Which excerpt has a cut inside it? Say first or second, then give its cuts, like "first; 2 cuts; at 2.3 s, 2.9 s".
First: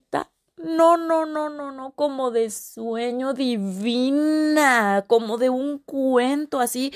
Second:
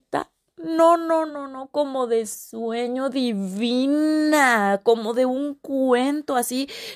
second; 1 cut; at 1.3 s